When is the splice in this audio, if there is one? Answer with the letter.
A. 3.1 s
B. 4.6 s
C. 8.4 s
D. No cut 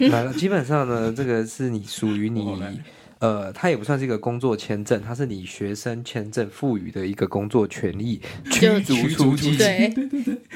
C